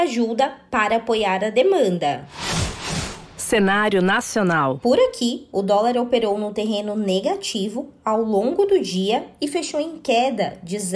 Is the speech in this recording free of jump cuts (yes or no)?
yes